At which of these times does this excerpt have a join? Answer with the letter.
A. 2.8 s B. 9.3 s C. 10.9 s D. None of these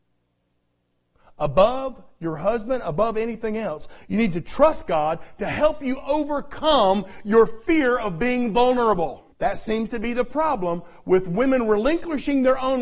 B